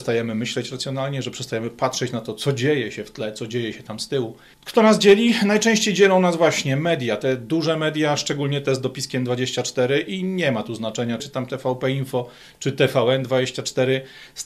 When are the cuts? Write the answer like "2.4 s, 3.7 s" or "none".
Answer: 4.5 s, 11.2 s